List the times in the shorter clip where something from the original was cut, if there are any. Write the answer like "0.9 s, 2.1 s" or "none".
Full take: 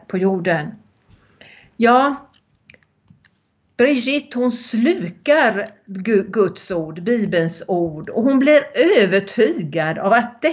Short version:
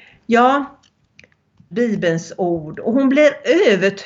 1.7 s